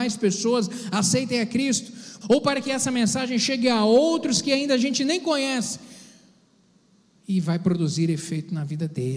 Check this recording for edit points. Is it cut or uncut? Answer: cut